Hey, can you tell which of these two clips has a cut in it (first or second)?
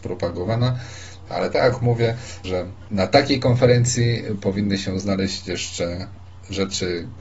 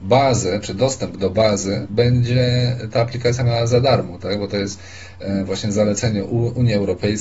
first